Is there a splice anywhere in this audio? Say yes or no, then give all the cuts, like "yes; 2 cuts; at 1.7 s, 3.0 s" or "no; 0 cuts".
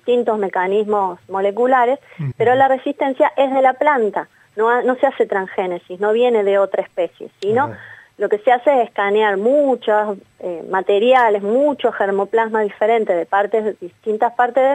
yes; 1 cut; at 2.3 s